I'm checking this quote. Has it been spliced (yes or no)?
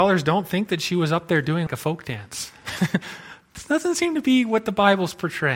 yes